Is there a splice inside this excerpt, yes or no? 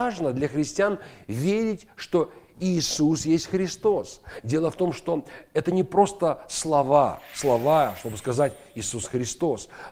no